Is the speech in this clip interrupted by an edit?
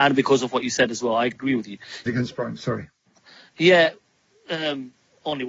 yes; 1 cut; at 2.1 s

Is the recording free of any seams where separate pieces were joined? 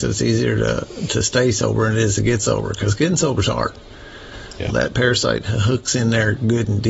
no; 1 cut; at 4.7 s

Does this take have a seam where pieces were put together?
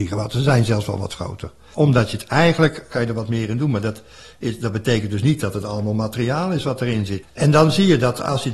yes; 3 cuts; at 1.7 s, 2.9 s, 7.2 s

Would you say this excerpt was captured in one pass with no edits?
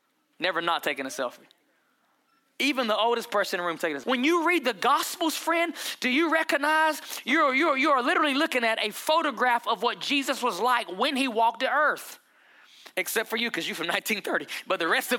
no; 2 cuts; at 4.0 s, 12.9 s

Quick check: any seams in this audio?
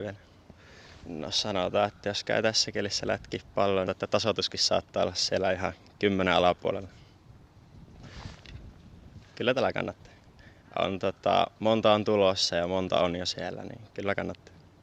yes; 3 cuts; at 1.0 s, 3.9 s, 9.2 s

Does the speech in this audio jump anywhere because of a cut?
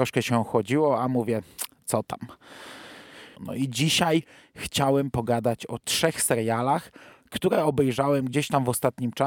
yes; 1 cut; at 3.4 s

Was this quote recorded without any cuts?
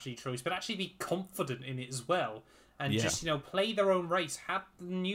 yes; 0 cuts

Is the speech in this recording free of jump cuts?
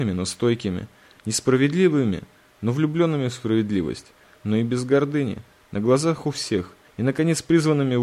no; 2 cuts; at 4.4 s, 6.8 s

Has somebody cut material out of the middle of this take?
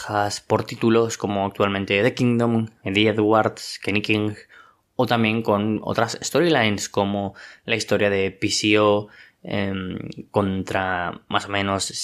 no; 0 cuts

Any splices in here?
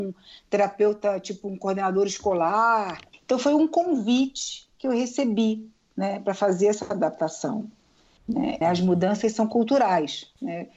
yes; 2 cuts; at 3.1 s, 8.6 s

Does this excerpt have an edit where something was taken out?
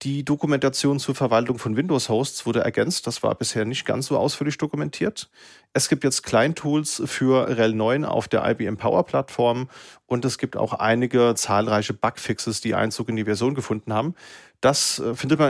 no; 0 cuts

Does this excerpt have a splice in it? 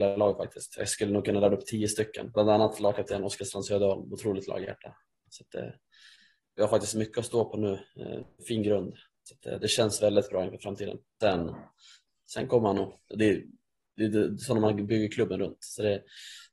yes; 3 cuts; at 5.3 s, 11.2 s, 13.1 s

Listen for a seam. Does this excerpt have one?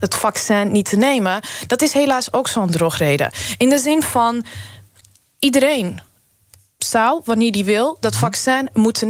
no; 0 cuts

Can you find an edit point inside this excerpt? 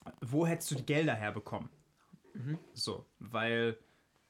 no; 0 cuts

